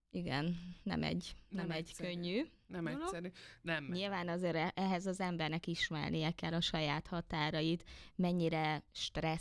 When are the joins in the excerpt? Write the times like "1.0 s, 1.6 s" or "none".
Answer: 3.6 s